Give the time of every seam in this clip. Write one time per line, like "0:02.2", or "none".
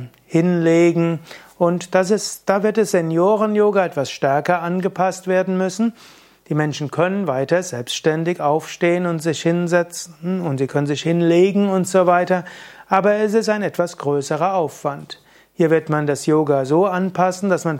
none